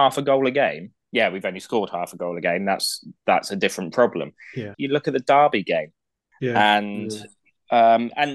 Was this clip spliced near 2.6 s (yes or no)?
no